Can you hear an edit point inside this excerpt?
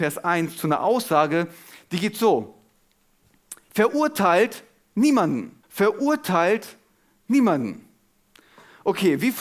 yes; 1 cut; at 5.6 s

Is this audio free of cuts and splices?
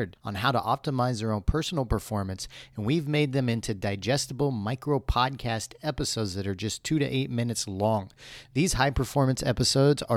yes; 0 cuts

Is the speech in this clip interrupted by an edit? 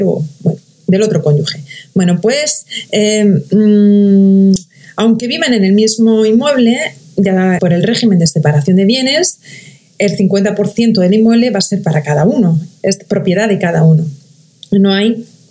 yes; 1 cut; at 7.6 s

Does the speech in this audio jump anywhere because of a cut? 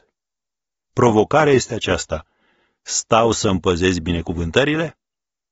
no; 0 cuts

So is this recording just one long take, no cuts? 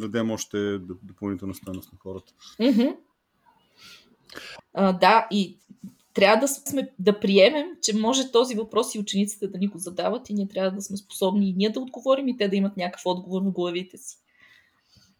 no; 2 cuts; at 4.6 s, 6.7 s

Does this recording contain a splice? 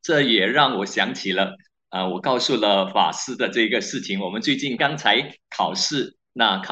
yes; 1 cut; at 4.8 s

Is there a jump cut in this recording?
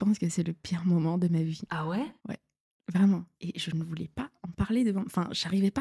yes; 2 cuts; at 2.2 s, 3.3 s

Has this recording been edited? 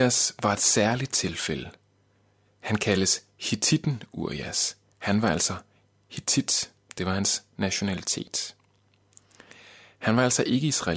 no; 0 cuts

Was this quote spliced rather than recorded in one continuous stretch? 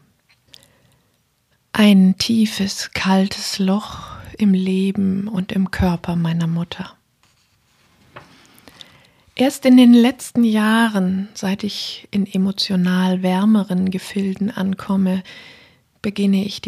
no; 0 cuts

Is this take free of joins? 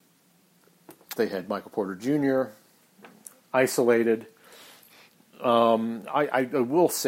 no; 1 cut; at 1.2 s

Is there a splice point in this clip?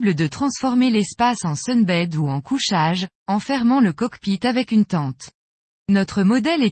yes; 1 cut; at 5.7 s

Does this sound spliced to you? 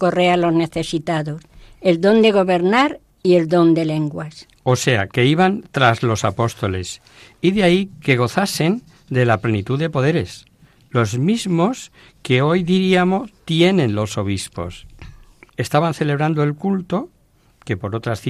yes; 1 cut; at 15.5 s

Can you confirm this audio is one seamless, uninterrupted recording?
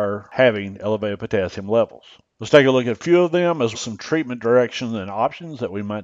no; 2 cuts; at 2.2 s, 3.7 s

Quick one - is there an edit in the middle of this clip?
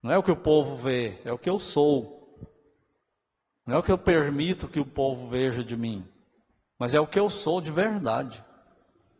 no; 0 cuts

